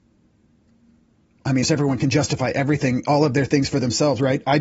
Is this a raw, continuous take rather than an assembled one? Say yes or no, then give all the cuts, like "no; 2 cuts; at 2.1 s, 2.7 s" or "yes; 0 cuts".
no; 1 cut; at 1.6 s